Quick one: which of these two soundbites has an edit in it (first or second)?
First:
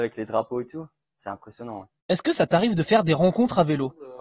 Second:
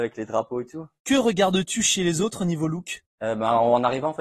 second